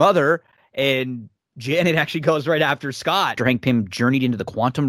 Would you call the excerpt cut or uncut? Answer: cut